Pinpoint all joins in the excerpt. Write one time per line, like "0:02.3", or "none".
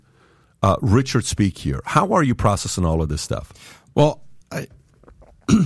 0:04.4